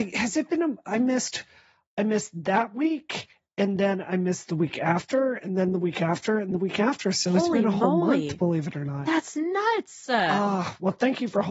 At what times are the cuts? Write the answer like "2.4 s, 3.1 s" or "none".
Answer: 6.5 s